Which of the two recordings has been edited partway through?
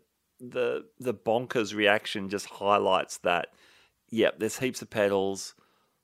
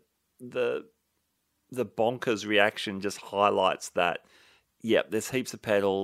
first; 1 cut; at 0.9 s

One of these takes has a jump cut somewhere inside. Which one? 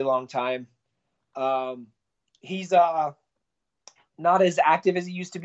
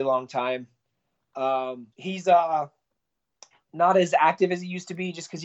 second; 1 cut; at 1.9 s

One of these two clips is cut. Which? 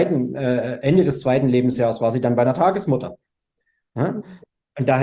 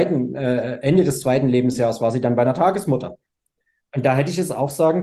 second; 1 cut; at 3.8 s

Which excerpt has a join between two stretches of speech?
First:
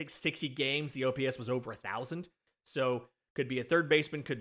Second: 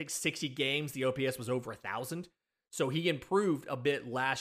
first; 1 cut; at 2.5 s

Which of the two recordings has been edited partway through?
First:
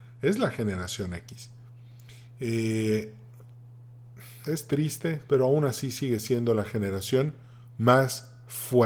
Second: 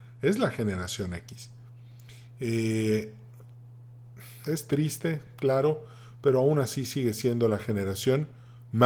first; 1 cut; at 5.3 s

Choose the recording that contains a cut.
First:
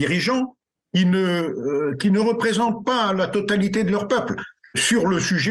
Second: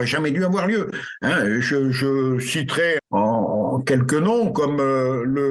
second; 1 cut; at 3.0 s

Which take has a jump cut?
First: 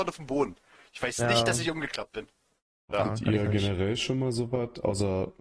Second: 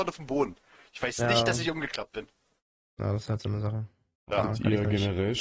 first; 1 cut; at 2.8 s

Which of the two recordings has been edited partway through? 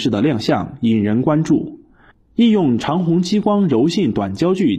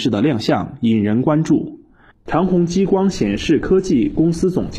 second; 1 cut; at 2.3 s

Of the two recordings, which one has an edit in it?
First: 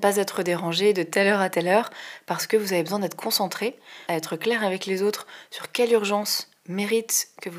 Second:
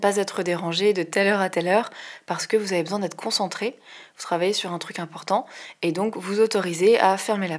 first; 1 cut; at 4.1 s

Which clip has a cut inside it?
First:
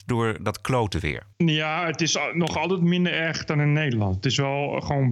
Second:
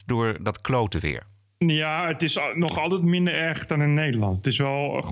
first; 1 cut; at 1.3 s

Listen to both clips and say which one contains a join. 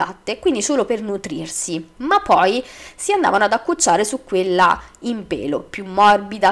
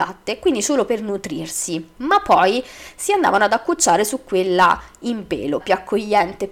second; 1 cut; at 5.6 s

